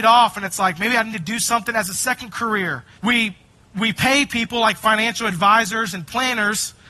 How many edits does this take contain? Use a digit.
1